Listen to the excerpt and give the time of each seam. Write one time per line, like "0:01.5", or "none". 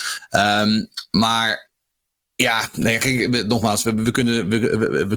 none